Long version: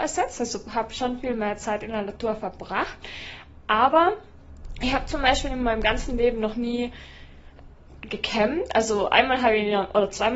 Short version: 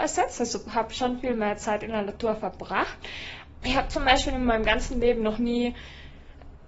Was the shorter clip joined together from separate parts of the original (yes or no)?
yes